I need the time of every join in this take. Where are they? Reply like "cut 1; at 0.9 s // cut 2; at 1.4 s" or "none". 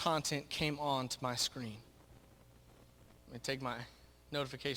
cut 1; at 3.2 s